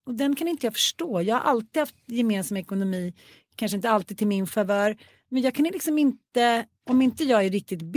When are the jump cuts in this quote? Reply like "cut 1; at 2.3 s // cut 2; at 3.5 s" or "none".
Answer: none